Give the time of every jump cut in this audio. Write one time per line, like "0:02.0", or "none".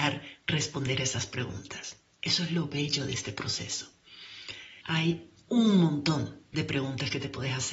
0:04.8